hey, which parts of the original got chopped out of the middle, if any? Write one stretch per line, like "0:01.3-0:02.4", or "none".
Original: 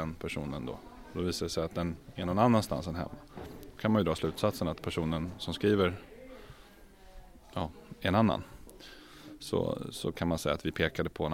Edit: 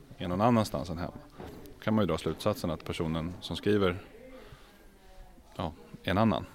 none